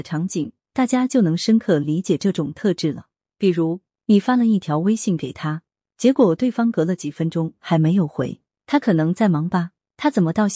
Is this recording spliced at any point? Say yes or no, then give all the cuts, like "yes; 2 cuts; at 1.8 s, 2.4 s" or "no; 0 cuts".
no; 0 cuts